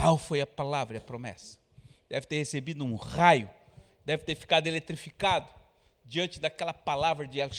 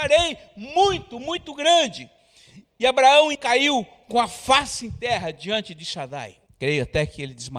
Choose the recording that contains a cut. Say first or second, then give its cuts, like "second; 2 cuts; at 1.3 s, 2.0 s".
second; 2 cuts; at 3.3 s, 6.5 s